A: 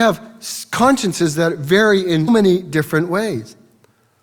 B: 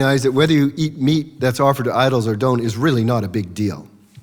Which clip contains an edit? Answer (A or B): A